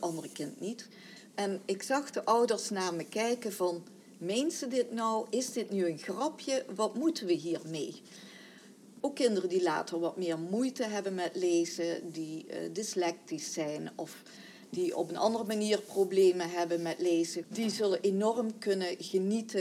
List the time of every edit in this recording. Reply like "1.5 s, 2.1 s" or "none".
1.3 s, 9.0 s, 17.4 s